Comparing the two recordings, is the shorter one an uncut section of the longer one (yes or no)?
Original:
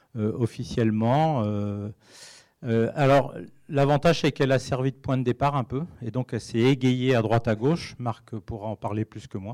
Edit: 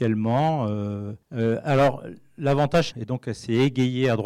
no